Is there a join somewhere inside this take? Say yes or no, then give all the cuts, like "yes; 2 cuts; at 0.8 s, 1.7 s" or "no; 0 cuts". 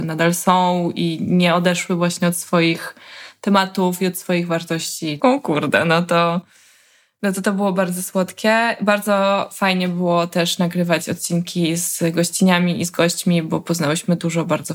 yes; 1 cut; at 5.2 s